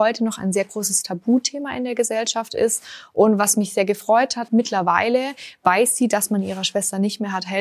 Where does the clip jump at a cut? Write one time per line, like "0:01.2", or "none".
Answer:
0:04.5